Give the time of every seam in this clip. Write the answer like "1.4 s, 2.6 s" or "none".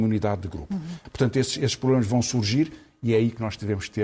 1.1 s